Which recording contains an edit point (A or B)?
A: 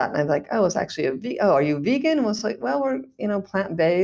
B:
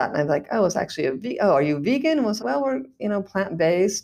B